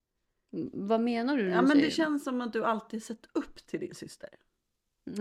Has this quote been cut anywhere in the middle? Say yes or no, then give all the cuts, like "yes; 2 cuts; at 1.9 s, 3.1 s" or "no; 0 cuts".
no; 0 cuts